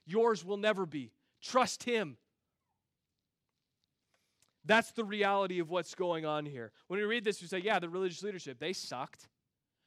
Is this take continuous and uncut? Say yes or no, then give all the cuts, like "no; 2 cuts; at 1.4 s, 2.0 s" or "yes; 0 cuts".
yes; 0 cuts